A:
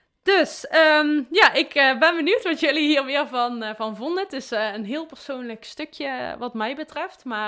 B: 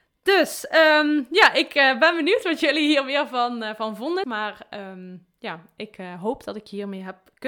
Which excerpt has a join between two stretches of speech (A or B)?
B